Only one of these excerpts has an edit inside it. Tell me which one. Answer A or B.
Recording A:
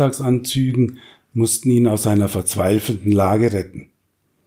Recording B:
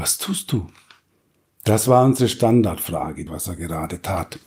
B